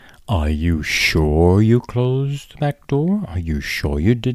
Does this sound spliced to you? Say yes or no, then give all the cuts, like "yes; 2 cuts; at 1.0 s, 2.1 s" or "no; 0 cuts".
no; 0 cuts